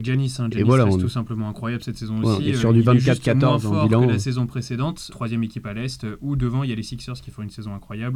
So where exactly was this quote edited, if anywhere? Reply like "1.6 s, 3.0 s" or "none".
5.1 s